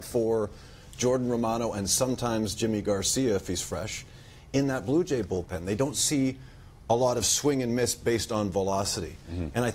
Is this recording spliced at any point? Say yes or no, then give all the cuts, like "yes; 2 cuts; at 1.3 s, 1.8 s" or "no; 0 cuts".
no; 0 cuts